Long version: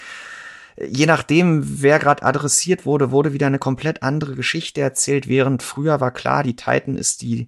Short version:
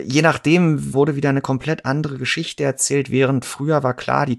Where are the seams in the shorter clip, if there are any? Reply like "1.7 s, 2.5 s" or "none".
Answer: 0.9 s